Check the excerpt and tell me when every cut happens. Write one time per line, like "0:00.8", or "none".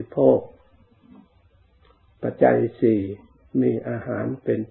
0:02.4